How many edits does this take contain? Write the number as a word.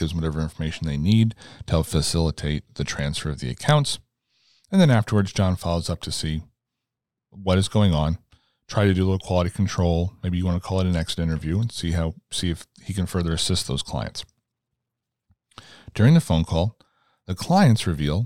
zero